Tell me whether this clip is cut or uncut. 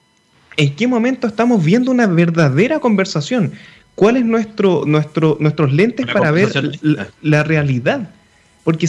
uncut